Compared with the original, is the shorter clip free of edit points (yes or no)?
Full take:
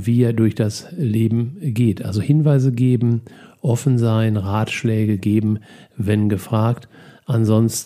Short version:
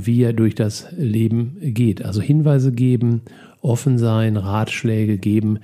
yes